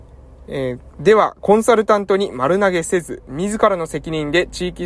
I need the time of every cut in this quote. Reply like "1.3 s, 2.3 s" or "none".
0.9 s